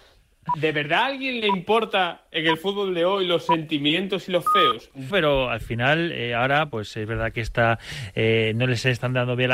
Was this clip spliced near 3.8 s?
no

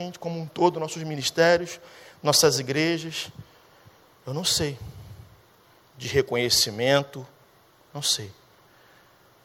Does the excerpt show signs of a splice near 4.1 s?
yes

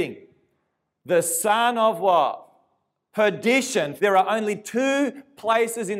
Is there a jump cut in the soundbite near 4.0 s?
yes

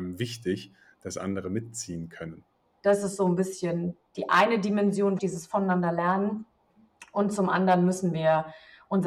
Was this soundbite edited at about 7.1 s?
no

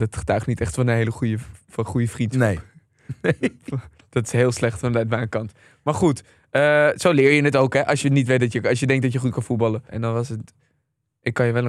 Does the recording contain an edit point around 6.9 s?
no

